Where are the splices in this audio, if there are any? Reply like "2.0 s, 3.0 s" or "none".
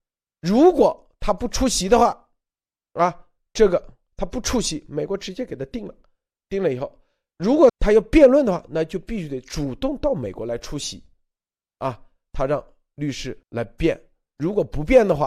7.7 s, 12.3 s, 13.4 s